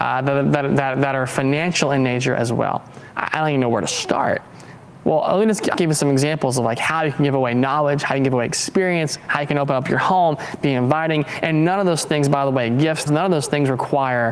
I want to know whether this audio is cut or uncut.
cut